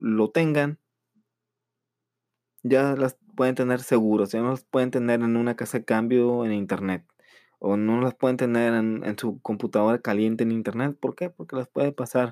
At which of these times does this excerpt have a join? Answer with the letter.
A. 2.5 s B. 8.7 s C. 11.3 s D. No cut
D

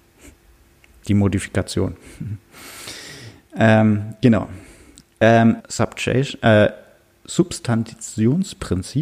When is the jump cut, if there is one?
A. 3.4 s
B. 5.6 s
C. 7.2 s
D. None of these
B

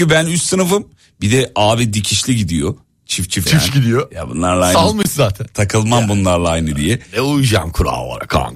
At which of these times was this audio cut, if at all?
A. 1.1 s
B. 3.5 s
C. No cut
B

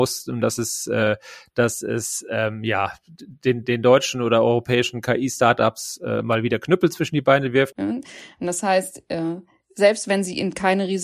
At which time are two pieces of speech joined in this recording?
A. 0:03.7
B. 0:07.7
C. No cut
B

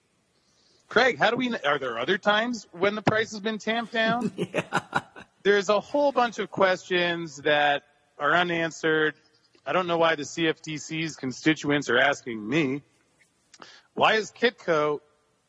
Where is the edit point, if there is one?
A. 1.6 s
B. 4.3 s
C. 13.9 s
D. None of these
D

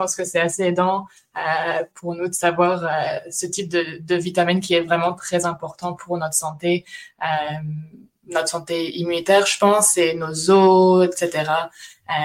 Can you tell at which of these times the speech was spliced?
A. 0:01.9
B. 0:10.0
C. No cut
A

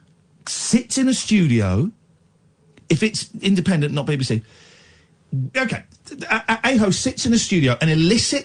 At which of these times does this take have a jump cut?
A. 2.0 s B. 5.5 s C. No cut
B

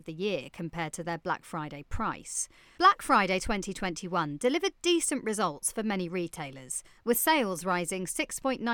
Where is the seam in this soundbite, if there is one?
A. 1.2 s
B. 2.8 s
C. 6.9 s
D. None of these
B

